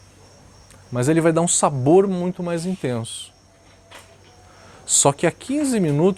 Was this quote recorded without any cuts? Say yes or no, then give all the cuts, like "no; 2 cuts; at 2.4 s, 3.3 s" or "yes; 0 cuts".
yes; 0 cuts